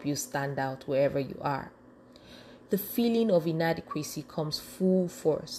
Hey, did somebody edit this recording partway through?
yes; 1 cut; at 2.7 s

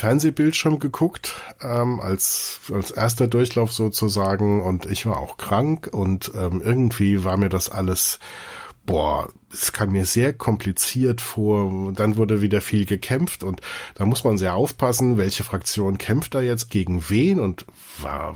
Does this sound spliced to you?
yes; 2 cuts; at 11.9 s, 16.7 s

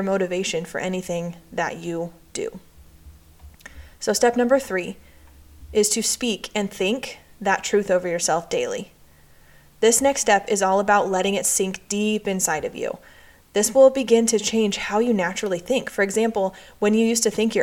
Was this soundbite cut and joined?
no; 0 cuts

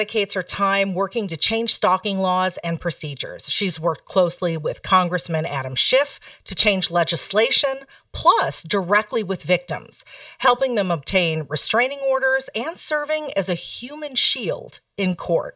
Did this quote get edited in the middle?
no; 0 cuts

